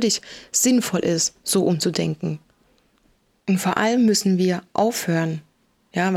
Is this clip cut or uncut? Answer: uncut